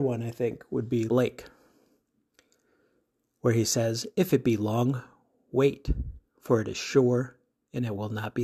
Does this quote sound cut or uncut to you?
cut